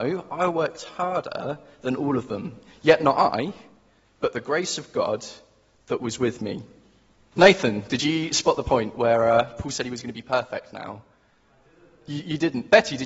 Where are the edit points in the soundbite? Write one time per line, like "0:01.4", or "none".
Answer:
0:07.3